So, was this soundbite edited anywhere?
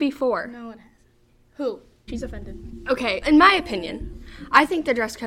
yes; 2 cuts; at 2.1 s, 3.2 s

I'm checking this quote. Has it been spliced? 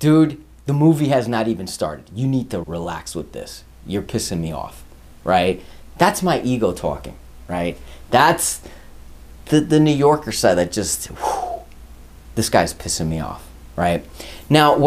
yes; 1 cut; at 2.6 s

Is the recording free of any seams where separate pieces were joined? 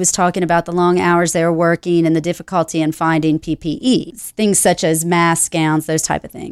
yes; 0 cuts

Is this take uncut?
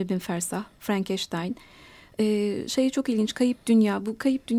yes; 0 cuts

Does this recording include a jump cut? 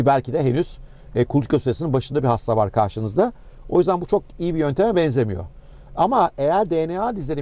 no; 0 cuts

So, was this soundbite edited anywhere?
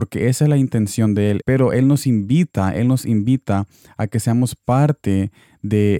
yes; 1 cut; at 1.4 s

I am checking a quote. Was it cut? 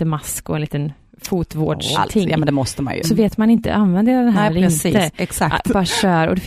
yes; 2 cuts; at 1.9 s, 3.0 s

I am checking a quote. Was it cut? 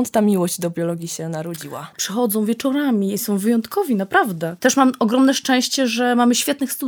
yes; 2 cuts; at 1.9 s, 3.2 s

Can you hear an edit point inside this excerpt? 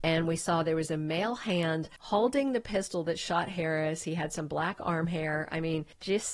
no; 0 cuts

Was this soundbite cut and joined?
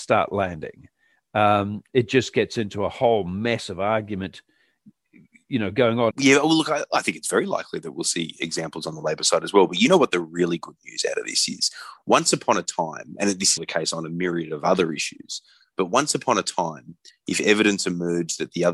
yes; 3 cuts; at 6.1 s, 13.6 s, 17.1 s

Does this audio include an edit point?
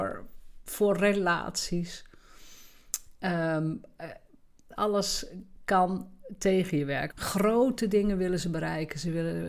yes; 2 cuts; at 4.8 s, 7.1 s

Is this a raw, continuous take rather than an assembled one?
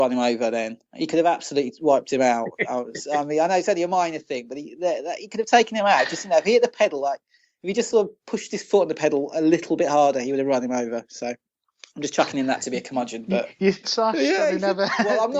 no; 1 cut; at 13.8 s

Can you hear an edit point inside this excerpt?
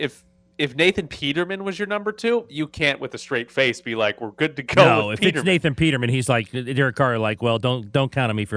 no; 0 cuts

